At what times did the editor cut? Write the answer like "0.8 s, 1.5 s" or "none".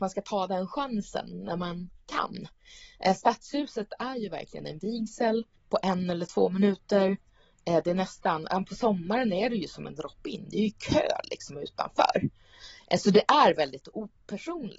5.6 s